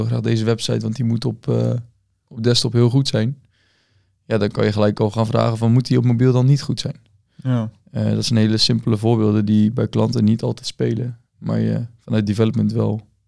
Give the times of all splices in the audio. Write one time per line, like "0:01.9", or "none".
none